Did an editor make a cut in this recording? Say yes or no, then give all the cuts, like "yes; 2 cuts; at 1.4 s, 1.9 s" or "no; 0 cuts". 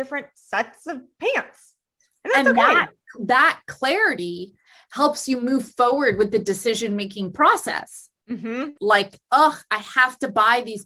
yes; 1 cut; at 8.8 s